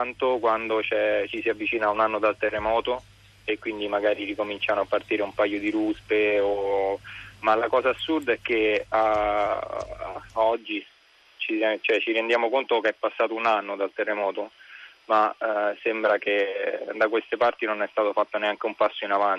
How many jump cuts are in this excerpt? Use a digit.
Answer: 0